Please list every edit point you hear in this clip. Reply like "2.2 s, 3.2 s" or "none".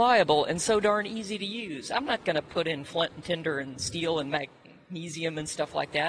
none